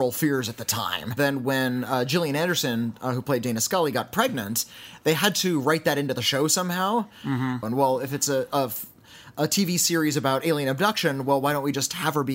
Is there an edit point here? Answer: yes; 2 cuts; at 1.2 s, 7.6 s

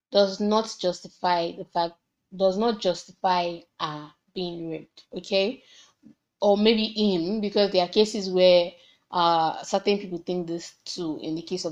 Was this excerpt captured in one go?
yes; 0 cuts

